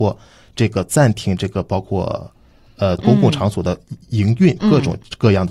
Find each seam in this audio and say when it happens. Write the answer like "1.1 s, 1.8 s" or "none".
3.0 s, 4.6 s